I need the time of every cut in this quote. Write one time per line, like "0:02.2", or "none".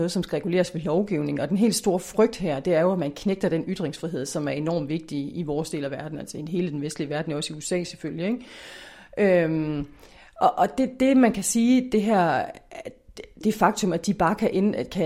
0:13.4